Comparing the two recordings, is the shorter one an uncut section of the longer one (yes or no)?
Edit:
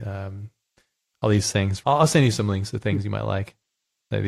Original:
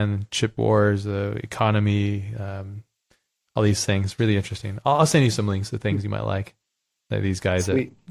no